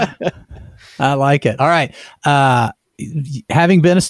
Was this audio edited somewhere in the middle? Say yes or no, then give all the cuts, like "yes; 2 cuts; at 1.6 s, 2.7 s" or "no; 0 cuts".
no; 0 cuts